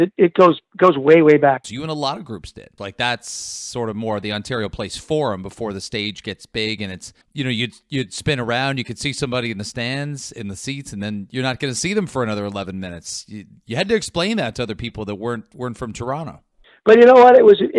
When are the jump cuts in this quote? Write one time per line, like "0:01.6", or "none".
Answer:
0:01.6
0:02.8
0:07.2

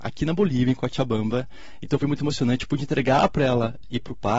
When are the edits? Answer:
none

